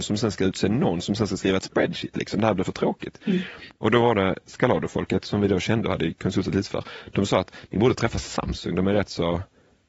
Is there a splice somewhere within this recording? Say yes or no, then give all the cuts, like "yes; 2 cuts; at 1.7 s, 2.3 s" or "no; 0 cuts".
no; 0 cuts